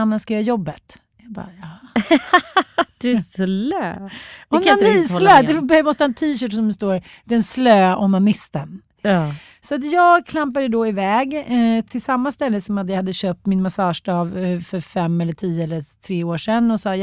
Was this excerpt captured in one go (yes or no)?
yes